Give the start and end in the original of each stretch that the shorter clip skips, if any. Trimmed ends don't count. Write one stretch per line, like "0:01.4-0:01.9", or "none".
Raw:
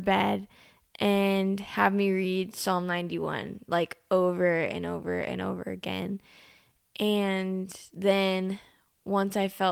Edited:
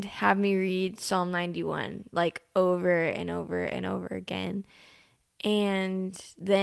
none